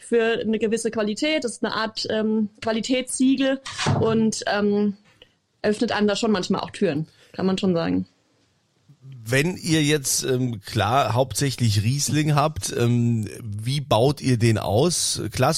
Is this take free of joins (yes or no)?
yes